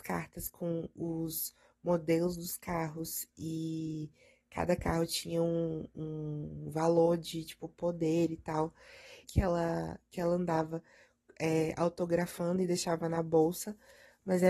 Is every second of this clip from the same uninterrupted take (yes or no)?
no